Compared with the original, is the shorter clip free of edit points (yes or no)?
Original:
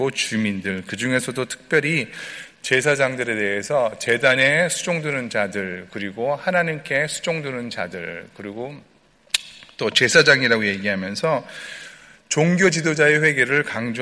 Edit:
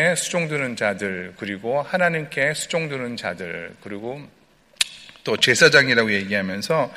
yes